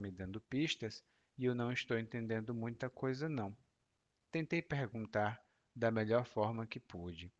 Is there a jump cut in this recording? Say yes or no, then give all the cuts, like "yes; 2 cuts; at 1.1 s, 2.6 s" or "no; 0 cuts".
yes; 1 cut; at 4.1 s